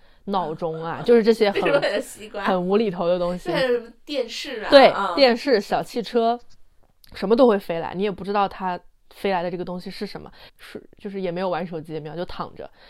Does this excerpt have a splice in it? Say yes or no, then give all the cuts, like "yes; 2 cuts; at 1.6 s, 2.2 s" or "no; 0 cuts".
yes; 1 cut; at 10.5 s